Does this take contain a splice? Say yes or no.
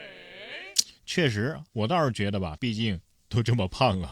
yes